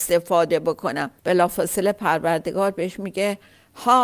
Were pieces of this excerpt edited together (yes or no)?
yes